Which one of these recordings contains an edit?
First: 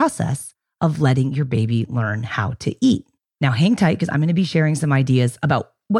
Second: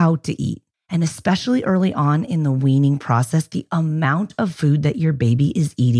first; 1 cut; at 3.2 s

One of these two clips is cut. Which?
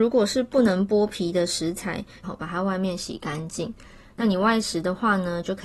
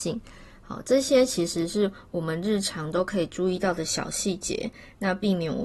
first; 2 cuts; at 2.2 s, 4.1 s

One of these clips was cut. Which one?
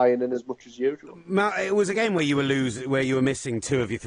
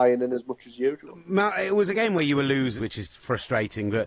second; 1 cut; at 2.8 s

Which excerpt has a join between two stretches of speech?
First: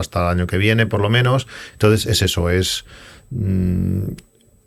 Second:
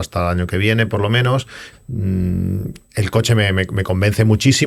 second; 2 cuts; at 1.7 s, 2.8 s

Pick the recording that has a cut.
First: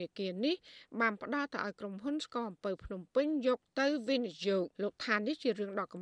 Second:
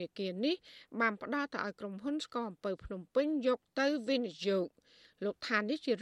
first; 1 cut; at 4.7 s

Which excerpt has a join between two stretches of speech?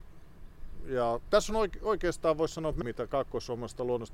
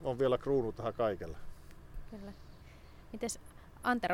first; 2 cuts; at 1.3 s, 2.8 s

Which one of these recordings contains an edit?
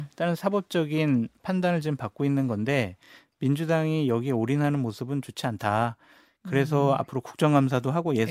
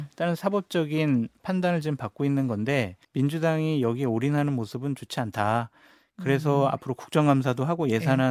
second; 1 cut; at 3.0 s

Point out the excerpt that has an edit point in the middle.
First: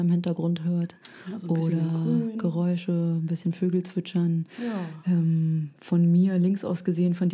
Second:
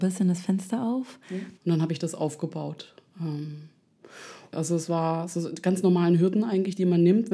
second; 2 cuts; at 1.6 s, 4.5 s

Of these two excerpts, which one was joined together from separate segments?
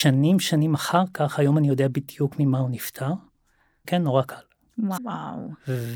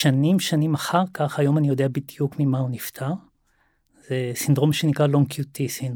first; 2 cuts; at 3.8 s, 5.0 s

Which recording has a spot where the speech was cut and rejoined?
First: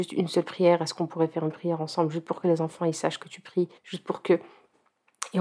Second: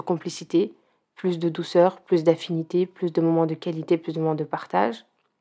first; 1 cut; at 3.8 s

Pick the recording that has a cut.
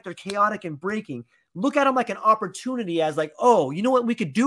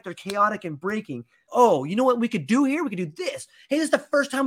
second; 1 cut; at 1.5 s

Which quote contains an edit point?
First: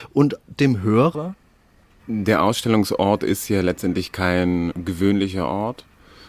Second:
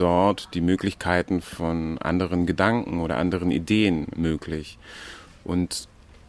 first; 1 cut; at 2.0 s

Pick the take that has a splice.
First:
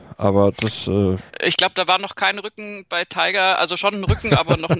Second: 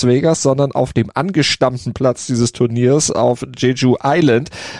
first; 1 cut; at 1.3 s

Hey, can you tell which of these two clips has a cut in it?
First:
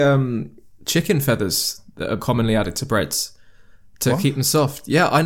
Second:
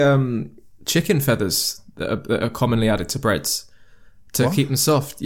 first; 1 cut; at 2.2 s

